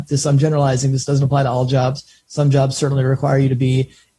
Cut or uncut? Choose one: uncut